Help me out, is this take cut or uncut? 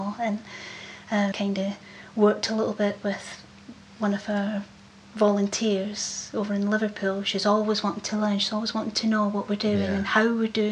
cut